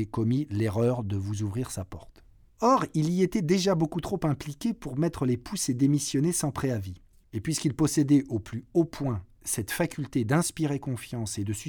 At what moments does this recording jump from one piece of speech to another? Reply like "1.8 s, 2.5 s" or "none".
2.5 s, 7.2 s